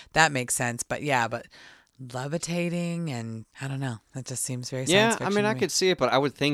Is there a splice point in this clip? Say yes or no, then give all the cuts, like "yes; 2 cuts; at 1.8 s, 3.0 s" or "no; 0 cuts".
yes; 1 cut; at 3.5 s